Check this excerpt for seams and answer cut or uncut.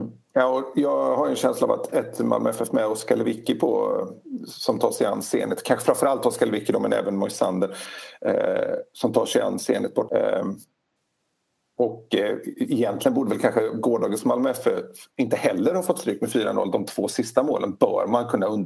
cut